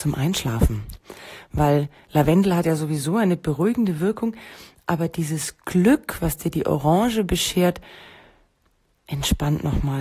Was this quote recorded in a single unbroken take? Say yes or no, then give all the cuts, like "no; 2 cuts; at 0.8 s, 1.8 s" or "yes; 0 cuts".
yes; 0 cuts